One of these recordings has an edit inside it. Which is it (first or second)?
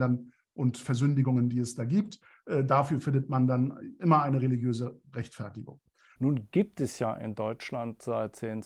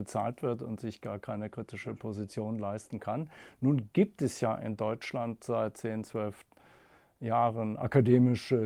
first